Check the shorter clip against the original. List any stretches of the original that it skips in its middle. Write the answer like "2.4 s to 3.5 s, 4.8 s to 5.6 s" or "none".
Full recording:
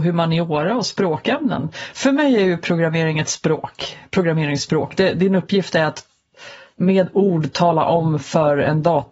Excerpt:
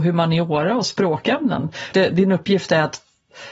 1.9 s to 5.0 s